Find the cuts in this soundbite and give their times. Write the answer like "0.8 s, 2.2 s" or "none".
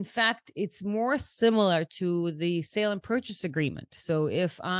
none